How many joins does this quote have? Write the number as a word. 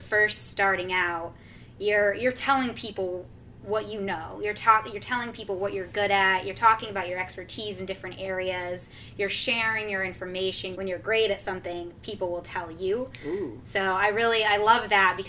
one